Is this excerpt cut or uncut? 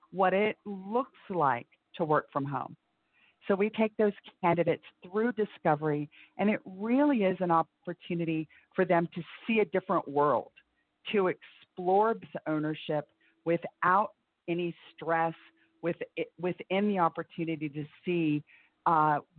uncut